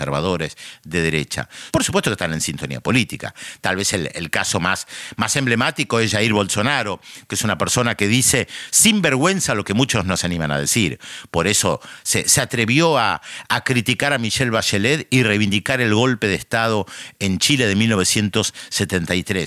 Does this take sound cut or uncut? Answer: cut